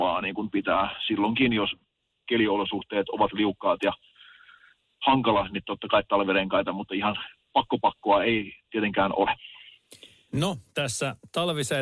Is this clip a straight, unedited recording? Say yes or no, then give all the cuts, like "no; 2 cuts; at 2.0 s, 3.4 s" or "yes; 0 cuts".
yes; 0 cuts